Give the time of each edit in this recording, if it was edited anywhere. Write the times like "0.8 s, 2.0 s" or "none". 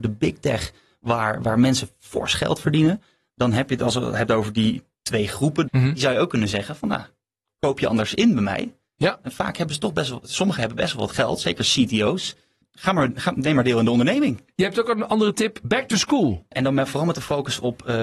5.7 s

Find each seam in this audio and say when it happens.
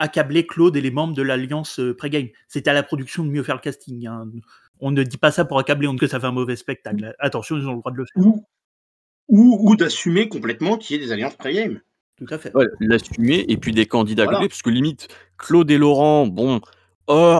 6.0 s

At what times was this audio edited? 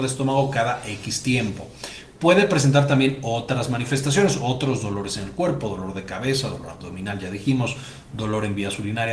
none

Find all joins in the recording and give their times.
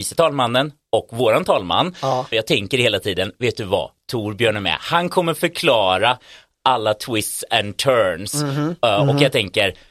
2.3 s

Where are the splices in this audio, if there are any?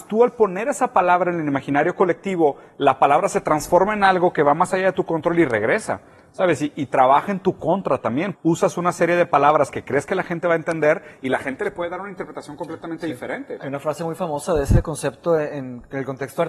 8.3 s

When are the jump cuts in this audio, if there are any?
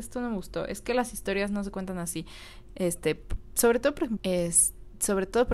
2.7 s, 4.2 s

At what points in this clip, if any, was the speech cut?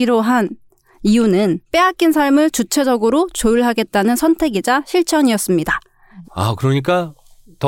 1.6 s, 6.2 s

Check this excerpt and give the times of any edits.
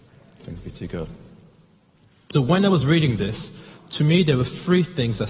2.3 s

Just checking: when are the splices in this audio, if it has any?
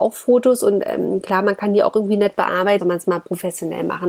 2.8 s

